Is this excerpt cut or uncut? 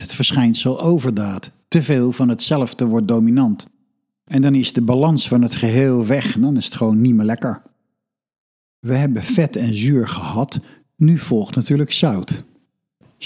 uncut